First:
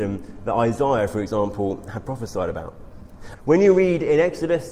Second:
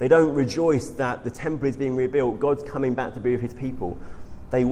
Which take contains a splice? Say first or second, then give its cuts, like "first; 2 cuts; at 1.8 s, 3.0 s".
first; 1 cut; at 3.3 s